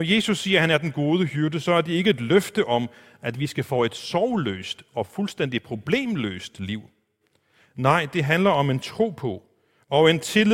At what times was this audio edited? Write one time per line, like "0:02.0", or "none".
none